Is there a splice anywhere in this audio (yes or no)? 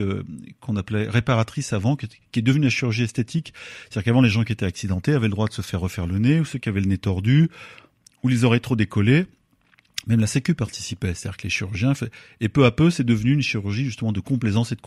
no